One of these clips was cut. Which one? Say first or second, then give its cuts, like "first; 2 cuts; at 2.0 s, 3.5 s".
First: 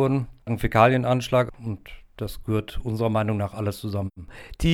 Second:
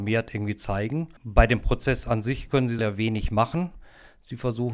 second; 1 cut; at 2.8 s